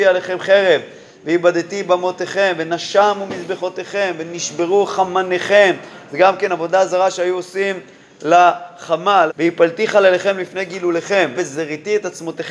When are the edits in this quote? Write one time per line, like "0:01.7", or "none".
0:09.3
0:11.3